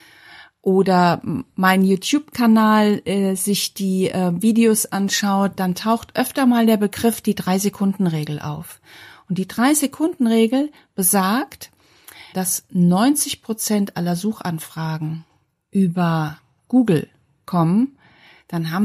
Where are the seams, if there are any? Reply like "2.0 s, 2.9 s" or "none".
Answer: 12.3 s